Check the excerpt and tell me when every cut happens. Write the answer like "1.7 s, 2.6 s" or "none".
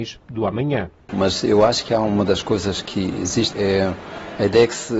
1.1 s, 3.5 s